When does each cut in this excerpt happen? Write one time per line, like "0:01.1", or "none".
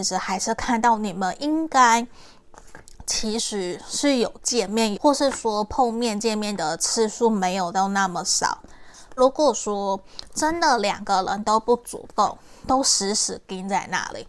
0:04.9
0:09.2